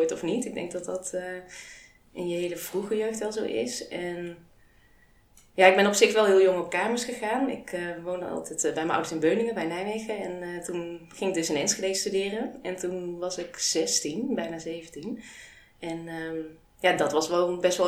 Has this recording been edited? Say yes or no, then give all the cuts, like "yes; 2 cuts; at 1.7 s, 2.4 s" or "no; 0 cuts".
no; 0 cuts